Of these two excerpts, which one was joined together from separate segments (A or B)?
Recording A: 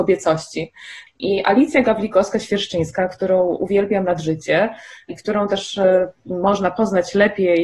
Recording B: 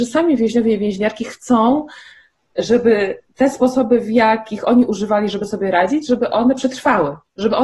A